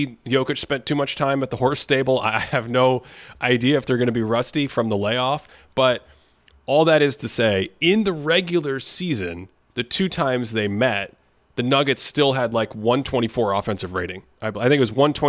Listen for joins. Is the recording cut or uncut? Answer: uncut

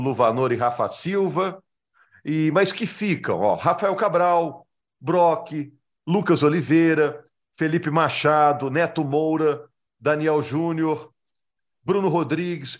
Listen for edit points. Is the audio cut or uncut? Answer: uncut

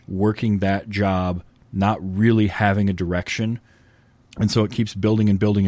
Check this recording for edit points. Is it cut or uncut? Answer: cut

